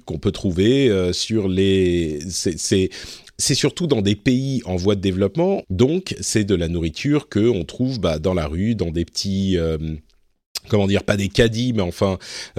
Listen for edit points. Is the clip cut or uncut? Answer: cut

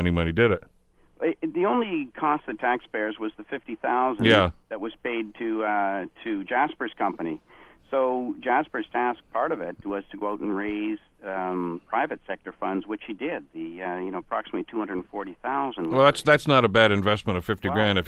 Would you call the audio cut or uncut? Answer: uncut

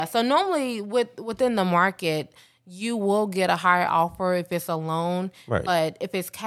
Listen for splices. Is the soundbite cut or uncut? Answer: uncut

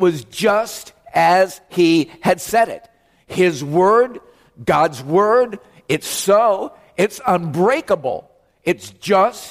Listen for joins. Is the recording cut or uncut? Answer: uncut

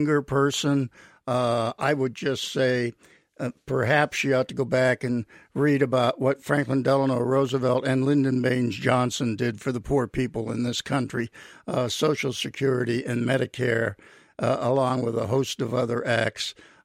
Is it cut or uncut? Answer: uncut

